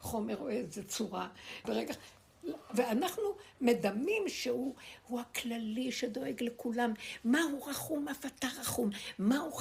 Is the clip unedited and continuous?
no; 1 cut; at 1.6 s

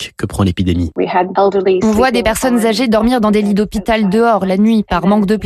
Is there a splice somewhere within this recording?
no; 0 cuts

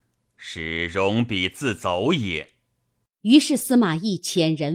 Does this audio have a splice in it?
yes; 1 cut; at 3.1 s

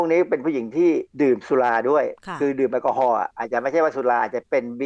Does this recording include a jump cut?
yes; 1 cut; at 1.1 s

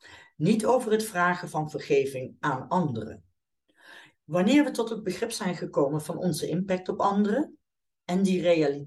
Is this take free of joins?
no; 1 cut; at 4.1 s

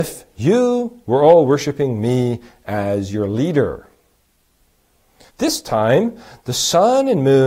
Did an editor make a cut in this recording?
yes; 1 cut; at 5.3 s

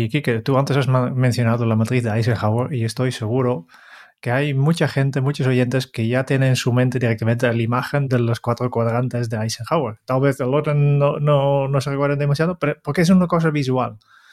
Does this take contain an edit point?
no; 0 cuts

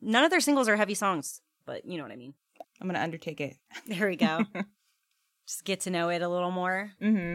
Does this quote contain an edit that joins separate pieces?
yes; 2 cuts; at 1.6 s, 2.6 s

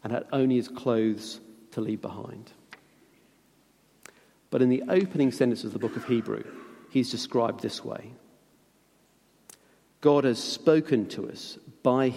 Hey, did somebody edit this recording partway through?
no; 0 cuts

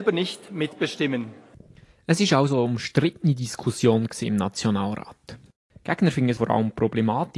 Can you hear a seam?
no; 0 cuts

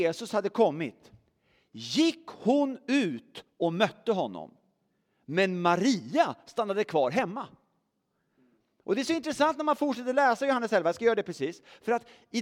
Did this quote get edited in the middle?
no; 0 cuts

